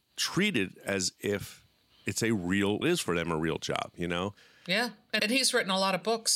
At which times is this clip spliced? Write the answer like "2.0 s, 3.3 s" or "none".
2.8 s, 5.2 s